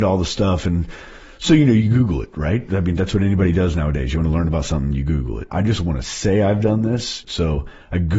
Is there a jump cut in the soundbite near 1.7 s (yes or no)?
no